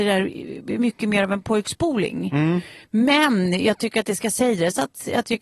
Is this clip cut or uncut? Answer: uncut